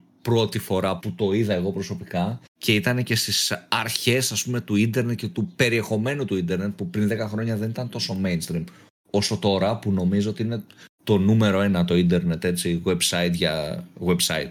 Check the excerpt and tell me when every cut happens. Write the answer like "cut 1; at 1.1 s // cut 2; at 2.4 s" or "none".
cut 1; at 1.0 s // cut 2; at 2.5 s